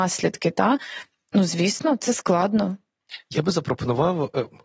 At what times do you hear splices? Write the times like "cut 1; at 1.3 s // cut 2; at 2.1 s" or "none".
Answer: none

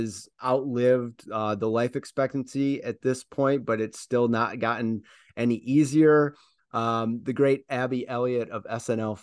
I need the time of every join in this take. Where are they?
cut 1; at 6.6 s

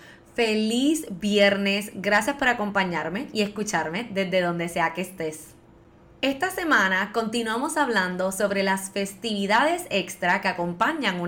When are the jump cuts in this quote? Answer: none

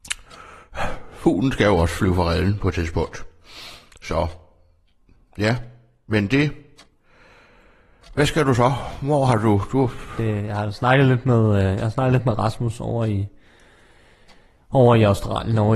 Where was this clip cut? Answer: none

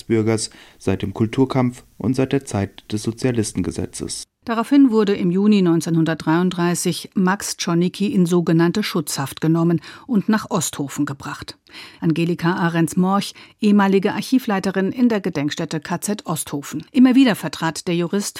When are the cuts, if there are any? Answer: cut 1; at 12.0 s // cut 2; at 16.9 s

